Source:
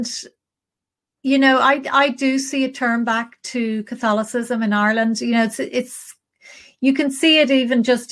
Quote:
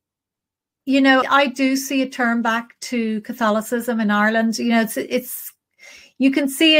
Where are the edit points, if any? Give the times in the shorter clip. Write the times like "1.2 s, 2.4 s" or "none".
1.2 s